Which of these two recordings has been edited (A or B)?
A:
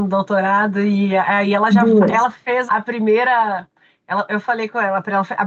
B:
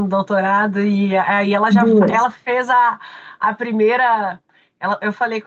A